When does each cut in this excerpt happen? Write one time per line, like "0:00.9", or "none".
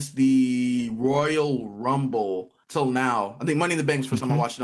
0:02.6